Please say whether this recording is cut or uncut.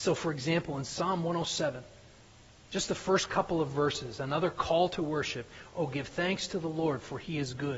uncut